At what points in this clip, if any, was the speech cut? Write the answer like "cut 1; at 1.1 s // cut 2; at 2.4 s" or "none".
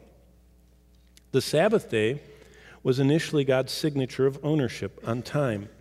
none